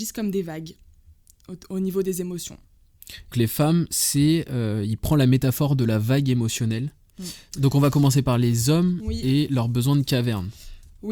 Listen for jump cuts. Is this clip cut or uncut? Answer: cut